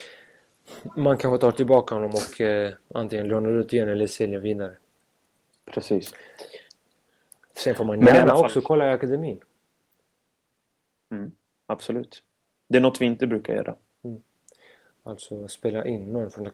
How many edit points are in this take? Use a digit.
0